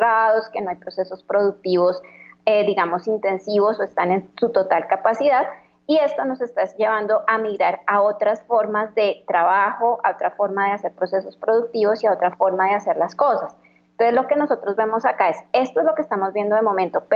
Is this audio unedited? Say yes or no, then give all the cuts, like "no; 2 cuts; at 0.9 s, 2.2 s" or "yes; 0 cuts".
yes; 0 cuts